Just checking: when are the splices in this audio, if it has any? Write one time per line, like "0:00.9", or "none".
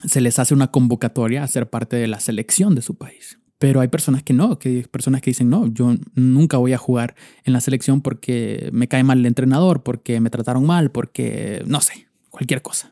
0:03.5